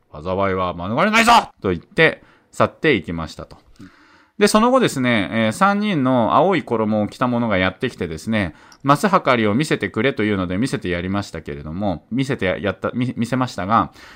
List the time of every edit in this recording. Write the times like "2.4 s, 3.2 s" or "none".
1.5 s